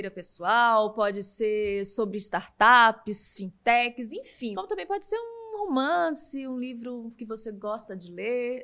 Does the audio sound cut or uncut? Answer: cut